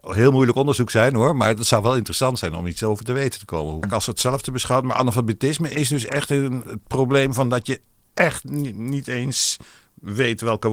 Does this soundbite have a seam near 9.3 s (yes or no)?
no